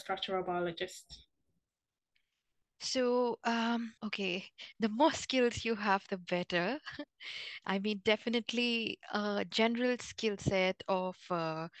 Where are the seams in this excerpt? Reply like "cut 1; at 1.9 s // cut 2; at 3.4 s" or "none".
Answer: cut 1; at 4.0 s